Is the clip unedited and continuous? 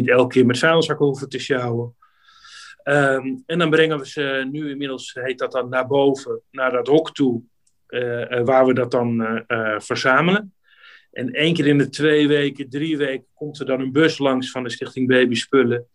yes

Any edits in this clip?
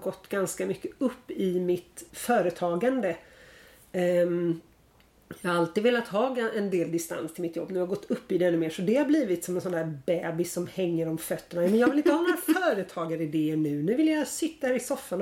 yes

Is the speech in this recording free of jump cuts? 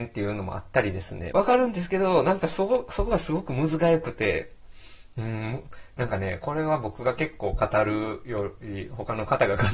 no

